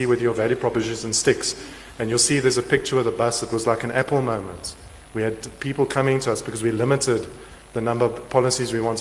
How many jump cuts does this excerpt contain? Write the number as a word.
zero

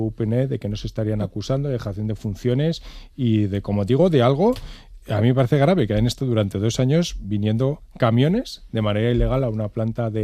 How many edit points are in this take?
zero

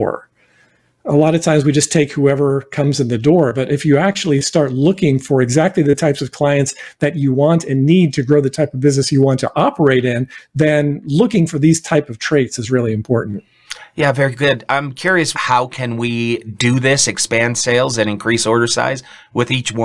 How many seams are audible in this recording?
one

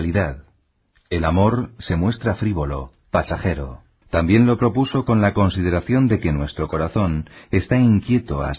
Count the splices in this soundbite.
one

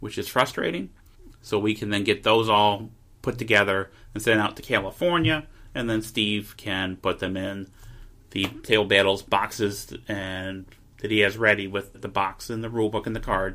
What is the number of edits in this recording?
two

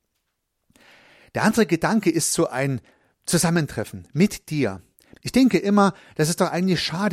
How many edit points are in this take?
one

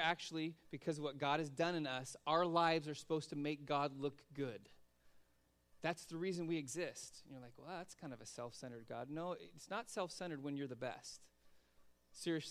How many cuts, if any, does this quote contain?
zero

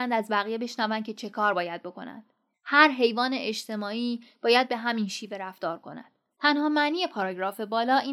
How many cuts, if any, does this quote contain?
two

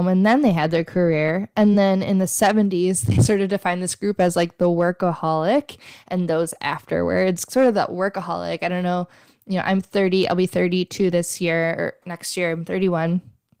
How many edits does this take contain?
zero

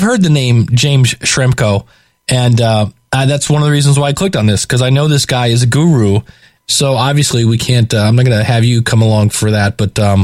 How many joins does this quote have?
one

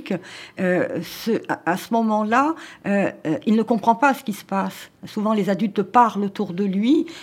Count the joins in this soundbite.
zero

